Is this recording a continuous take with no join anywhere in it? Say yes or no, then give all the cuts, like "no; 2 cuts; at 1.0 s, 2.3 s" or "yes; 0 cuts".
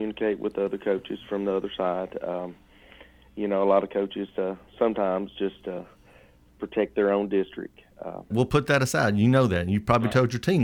no; 1 cut; at 8.3 s